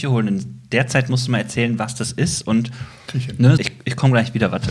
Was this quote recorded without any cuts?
no; 1 cut; at 3.6 s

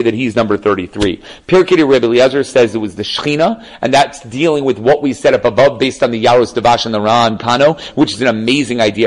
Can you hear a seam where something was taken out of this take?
no; 0 cuts

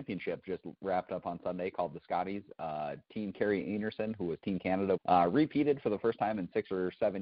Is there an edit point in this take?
yes; 1 cut; at 5.0 s

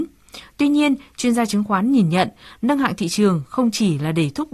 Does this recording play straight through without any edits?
yes; 0 cuts

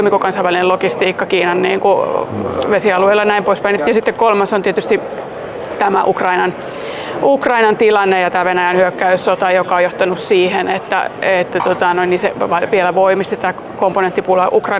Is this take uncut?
no; 1 cut; at 3.8 s

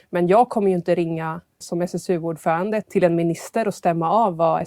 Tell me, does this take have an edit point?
yes; 2 cuts; at 1.6 s, 2.8 s

